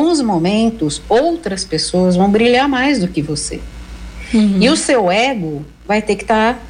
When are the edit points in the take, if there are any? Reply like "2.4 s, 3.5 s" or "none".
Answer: none